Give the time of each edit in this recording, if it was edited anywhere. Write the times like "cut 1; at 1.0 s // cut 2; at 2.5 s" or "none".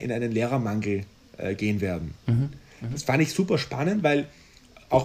cut 1; at 2.2 s